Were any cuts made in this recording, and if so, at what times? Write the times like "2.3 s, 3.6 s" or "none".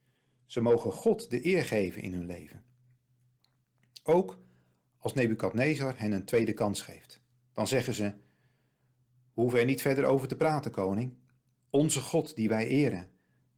none